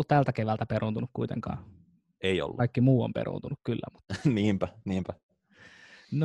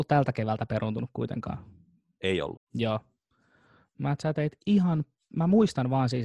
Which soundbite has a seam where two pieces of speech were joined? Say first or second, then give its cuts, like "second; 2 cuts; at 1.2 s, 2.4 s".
second; 1 cut; at 2.5 s